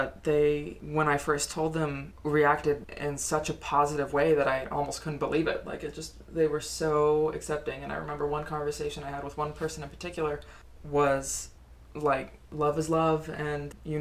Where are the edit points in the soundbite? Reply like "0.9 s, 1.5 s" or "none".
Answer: none